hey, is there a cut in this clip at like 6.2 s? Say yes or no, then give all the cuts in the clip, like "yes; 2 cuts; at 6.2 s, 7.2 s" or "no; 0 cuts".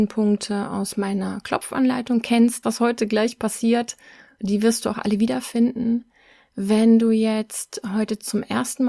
no; 1 cut; at 2.6 s